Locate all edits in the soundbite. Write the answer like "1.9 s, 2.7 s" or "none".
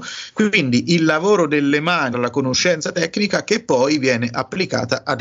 2.1 s